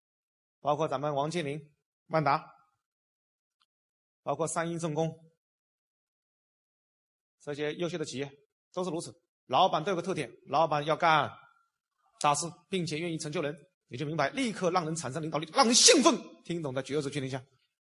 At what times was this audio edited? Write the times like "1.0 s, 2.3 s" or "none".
none